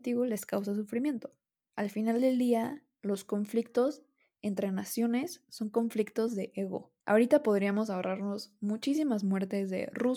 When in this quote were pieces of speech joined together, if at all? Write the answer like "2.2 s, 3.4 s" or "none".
1.7 s, 7.0 s